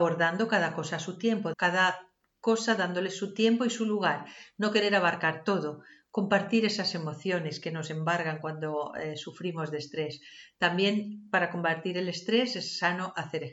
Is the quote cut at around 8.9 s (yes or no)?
no